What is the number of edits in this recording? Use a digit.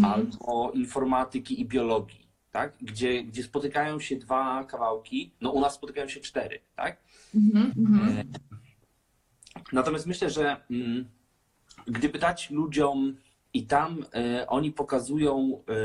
3